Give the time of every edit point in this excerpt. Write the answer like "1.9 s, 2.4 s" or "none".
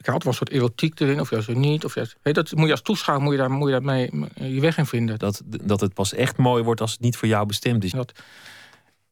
5.2 s, 7.9 s